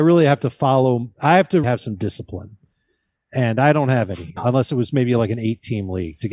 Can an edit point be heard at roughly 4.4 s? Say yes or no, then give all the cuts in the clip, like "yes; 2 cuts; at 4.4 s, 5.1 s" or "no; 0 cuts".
yes; 2 cuts; at 1.6 s, 4.4 s